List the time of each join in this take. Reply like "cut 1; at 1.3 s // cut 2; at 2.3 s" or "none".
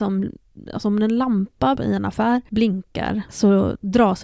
cut 1; at 1.8 s